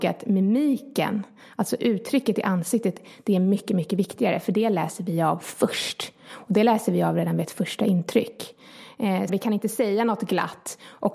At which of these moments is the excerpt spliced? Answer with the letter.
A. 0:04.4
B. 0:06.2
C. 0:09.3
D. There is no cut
C